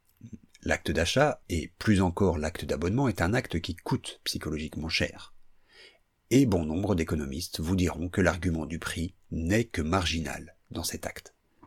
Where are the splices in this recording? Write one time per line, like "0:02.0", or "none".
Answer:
none